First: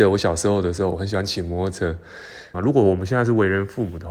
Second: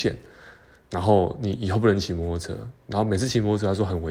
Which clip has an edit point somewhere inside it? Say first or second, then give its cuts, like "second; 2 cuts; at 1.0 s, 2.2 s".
first; 1 cut; at 2.5 s